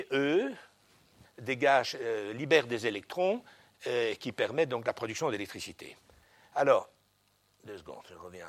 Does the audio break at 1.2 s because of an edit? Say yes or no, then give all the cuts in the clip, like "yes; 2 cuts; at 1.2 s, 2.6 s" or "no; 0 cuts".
yes; 1 cut; at 1.2 s